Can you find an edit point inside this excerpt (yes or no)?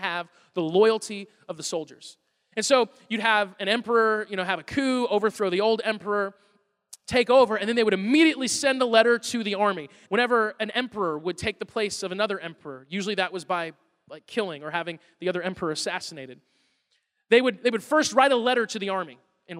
yes